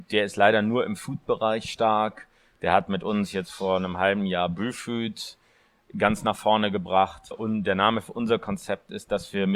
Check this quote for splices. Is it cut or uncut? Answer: cut